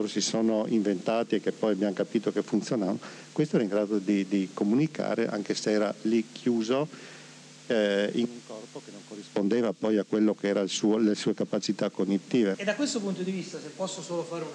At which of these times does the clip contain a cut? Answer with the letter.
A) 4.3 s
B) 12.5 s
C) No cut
B